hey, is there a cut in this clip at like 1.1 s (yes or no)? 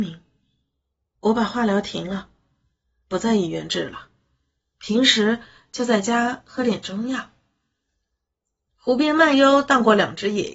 yes